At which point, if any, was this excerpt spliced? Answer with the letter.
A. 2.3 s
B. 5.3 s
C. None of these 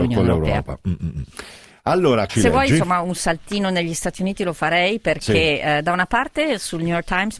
A